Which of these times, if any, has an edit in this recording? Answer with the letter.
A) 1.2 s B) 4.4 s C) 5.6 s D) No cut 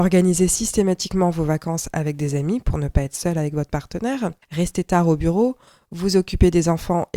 B